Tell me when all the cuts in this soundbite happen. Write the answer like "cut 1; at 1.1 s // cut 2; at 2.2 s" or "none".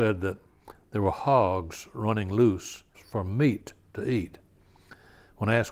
cut 1; at 2.9 s